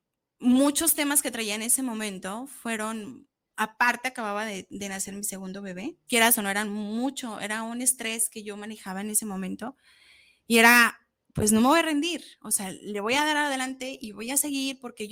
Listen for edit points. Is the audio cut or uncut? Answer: cut